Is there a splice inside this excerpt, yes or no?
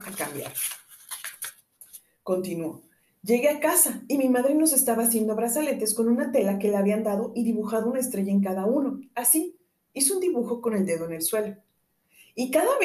no